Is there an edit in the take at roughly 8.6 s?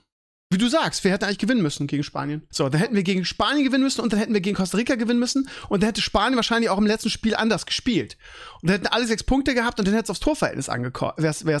no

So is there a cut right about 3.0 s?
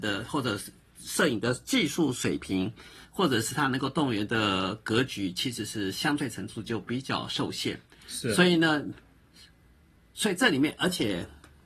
no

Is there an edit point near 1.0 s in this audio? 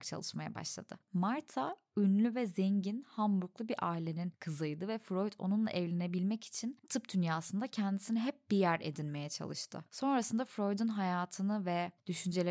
yes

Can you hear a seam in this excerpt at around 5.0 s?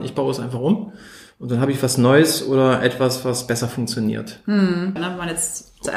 yes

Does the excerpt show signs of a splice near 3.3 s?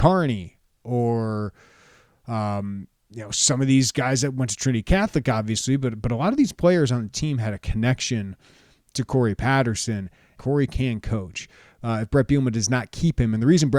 no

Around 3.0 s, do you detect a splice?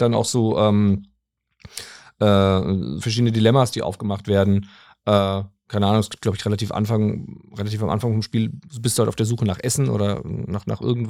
yes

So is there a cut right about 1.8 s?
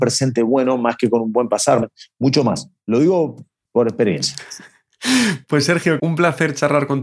yes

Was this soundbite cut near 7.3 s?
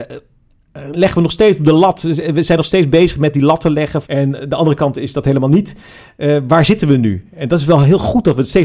no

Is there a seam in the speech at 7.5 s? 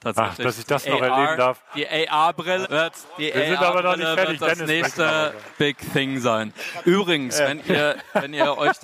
no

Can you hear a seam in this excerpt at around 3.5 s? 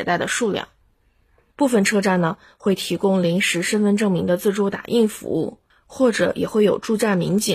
no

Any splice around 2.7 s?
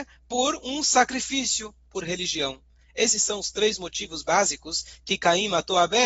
no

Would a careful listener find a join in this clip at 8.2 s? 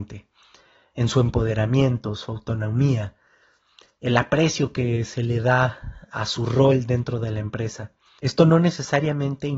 yes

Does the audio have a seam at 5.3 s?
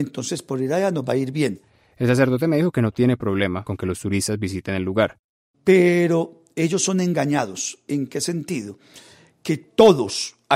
no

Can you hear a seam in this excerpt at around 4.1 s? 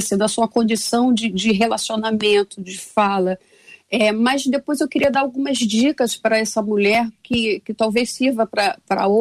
no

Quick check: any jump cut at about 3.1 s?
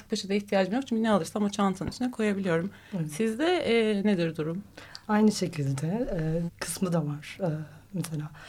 no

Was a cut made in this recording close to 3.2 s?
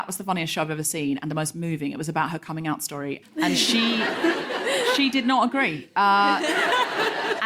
yes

